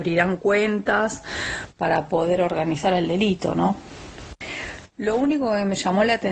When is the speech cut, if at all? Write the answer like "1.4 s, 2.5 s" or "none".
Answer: none